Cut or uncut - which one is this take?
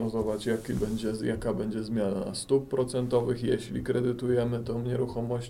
uncut